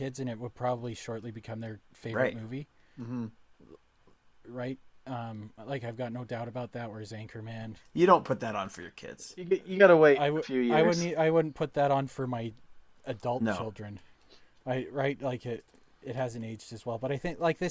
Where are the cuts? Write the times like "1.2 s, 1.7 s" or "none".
none